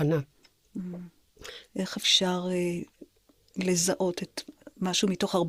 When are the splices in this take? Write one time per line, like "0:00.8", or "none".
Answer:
0:01.7